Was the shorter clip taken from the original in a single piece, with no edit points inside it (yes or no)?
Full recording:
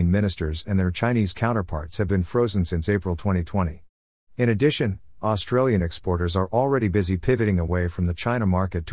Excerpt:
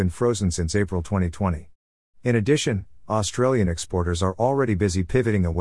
yes